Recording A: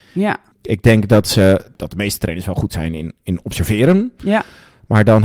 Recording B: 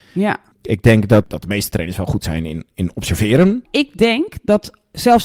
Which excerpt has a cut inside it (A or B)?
B